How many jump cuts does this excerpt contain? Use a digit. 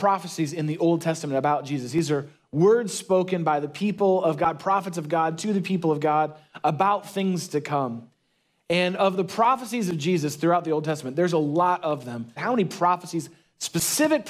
1